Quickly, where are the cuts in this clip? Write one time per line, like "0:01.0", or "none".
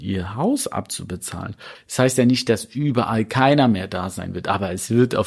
0:01.7